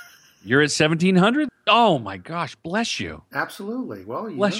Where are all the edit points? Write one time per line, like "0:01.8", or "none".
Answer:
0:01.5

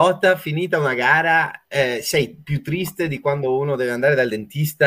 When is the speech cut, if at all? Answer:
none

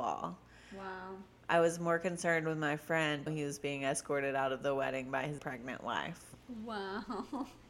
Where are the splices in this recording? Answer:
0:03.3
0:05.4

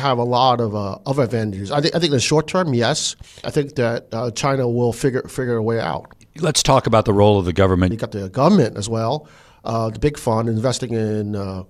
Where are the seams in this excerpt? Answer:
0:03.4
0:07.9

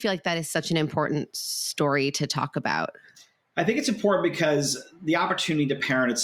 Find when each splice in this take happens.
none

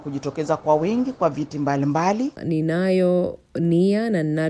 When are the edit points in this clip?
0:02.4

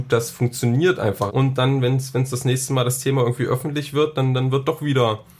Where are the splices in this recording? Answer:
0:01.3

